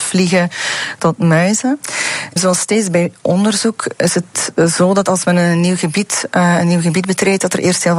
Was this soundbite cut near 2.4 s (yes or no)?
yes